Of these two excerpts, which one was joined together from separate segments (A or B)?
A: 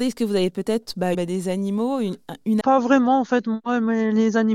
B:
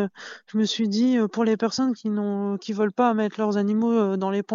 A